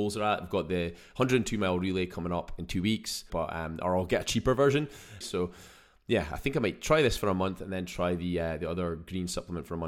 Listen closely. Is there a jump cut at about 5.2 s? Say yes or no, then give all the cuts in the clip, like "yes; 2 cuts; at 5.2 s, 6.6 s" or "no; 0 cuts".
yes; 2 cuts; at 3.3 s, 5.2 s